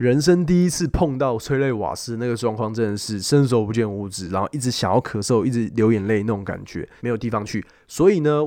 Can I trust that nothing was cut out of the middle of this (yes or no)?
no